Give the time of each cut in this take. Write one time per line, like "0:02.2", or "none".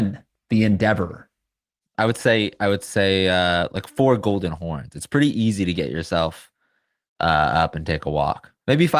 0:01.8

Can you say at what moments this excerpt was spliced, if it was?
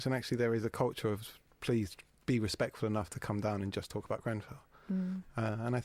none

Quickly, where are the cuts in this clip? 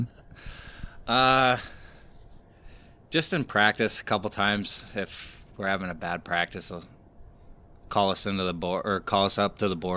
none

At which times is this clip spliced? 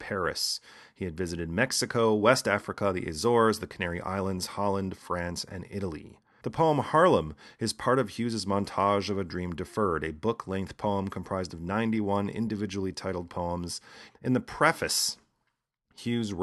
0:06.4
0:14.1

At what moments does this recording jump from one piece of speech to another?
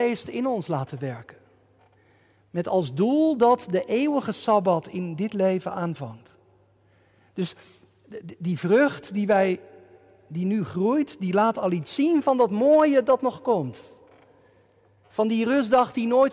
none

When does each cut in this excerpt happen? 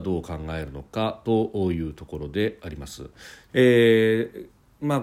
0:03.5

